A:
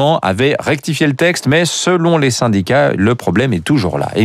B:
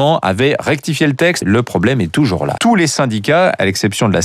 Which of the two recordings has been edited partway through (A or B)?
B